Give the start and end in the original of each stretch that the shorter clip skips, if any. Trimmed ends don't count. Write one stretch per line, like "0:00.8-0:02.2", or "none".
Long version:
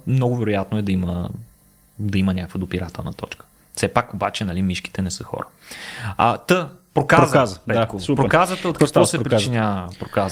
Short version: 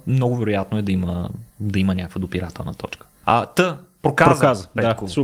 0:01.5-0:01.9
0:03.6-0:06.1